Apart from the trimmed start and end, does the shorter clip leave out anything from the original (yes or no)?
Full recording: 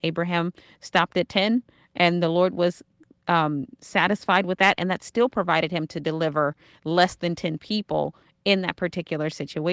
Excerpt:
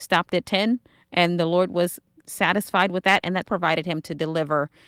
yes